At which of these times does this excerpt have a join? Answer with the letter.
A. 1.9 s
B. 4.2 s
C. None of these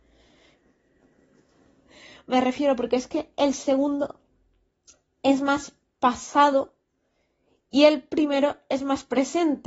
A